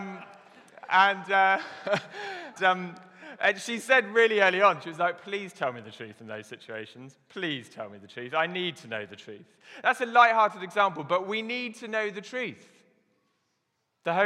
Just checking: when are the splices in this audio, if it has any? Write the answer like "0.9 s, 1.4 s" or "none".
2.6 s